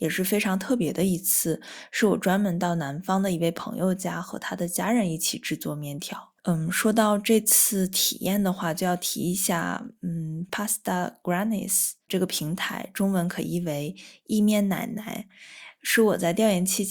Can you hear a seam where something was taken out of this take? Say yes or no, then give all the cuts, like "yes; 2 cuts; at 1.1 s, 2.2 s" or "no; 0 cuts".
yes; 1 cut; at 6.4 s